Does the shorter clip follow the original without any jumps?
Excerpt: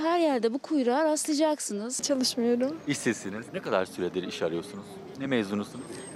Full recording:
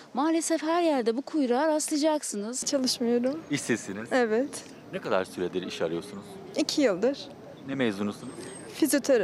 no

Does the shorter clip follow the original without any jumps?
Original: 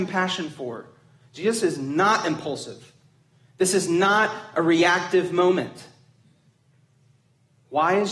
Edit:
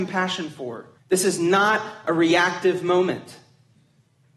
no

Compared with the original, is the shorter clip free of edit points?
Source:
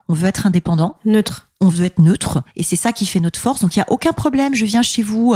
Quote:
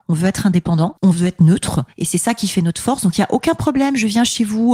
no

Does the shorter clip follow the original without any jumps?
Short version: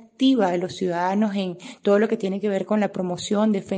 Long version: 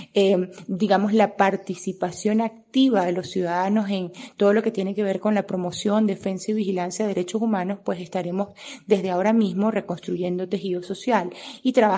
yes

